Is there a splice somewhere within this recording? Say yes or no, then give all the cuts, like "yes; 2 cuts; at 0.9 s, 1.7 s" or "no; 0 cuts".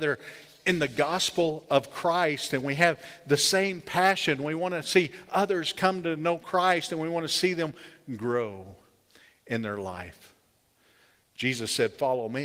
no; 0 cuts